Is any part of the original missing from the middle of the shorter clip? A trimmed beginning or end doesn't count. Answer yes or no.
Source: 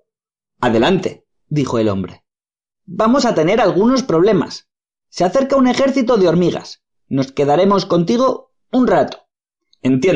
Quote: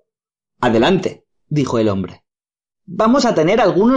no